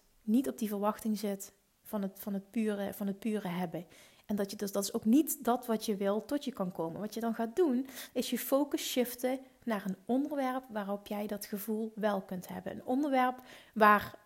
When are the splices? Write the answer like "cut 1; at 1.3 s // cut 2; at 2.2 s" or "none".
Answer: none